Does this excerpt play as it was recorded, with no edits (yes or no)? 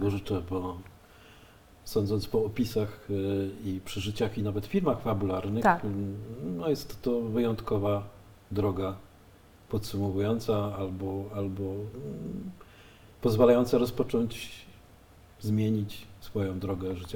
yes